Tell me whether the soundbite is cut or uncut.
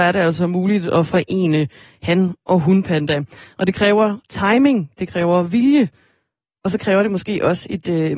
uncut